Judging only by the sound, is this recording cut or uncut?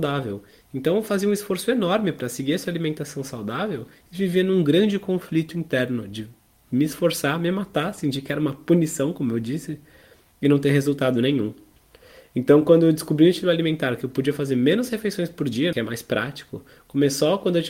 cut